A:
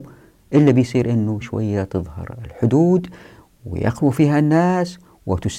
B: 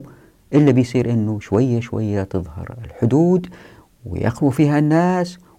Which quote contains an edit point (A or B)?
A